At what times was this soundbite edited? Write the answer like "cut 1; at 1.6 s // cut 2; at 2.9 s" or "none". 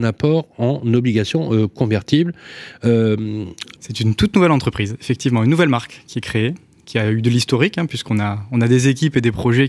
cut 1; at 3.8 s